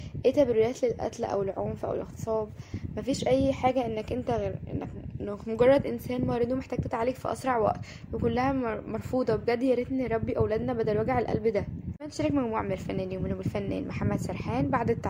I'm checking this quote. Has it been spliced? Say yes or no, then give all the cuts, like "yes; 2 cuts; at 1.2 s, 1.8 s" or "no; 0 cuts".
no; 0 cuts